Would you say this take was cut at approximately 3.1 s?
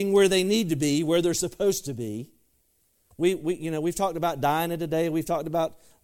yes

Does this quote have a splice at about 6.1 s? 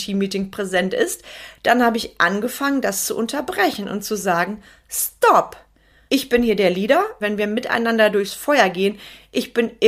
yes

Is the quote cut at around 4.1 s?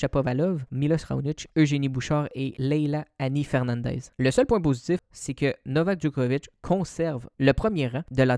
yes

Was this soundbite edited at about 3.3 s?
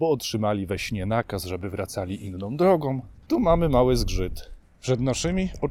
yes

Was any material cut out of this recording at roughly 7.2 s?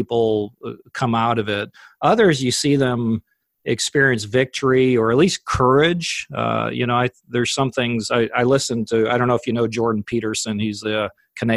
no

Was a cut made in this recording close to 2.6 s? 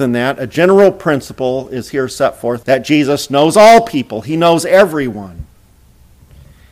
yes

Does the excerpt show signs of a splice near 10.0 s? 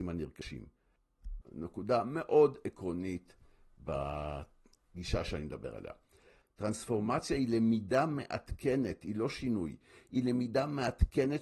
no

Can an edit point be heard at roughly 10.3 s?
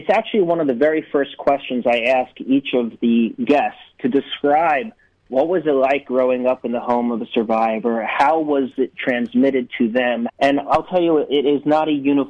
yes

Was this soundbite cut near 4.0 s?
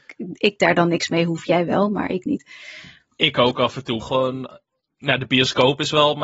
yes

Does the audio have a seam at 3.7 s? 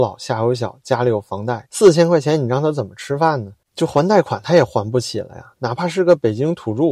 no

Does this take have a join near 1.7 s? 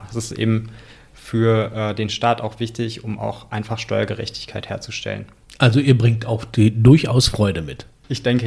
no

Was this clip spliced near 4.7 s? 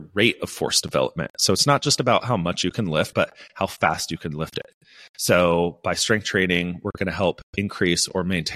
no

